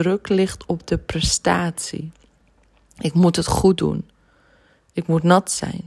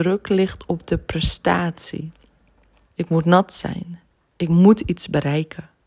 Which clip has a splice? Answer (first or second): second